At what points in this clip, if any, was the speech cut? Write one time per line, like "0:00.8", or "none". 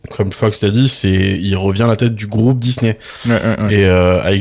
none